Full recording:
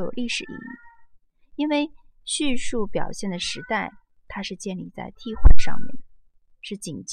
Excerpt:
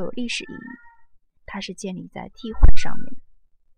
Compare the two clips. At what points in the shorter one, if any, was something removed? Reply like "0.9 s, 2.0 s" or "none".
1.4 s